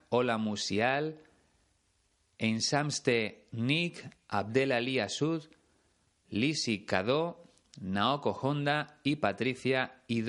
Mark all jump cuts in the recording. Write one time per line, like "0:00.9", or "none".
none